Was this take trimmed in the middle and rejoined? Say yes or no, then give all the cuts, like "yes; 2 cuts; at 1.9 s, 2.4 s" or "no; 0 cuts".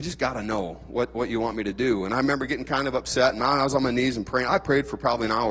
no; 0 cuts